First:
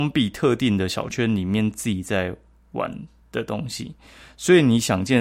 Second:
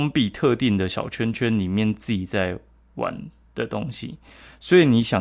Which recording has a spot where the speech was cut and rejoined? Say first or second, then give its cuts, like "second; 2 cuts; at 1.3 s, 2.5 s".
first; 1 cut; at 1.1 s